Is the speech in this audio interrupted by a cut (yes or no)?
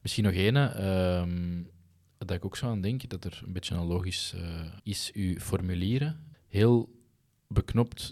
yes